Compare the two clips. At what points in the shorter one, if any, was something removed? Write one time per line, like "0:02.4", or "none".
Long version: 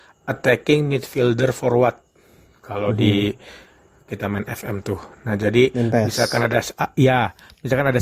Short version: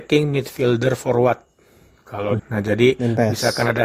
0:02.4